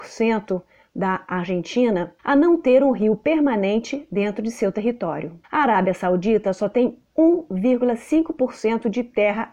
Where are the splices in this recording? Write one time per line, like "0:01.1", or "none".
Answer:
0:02.2
0:05.4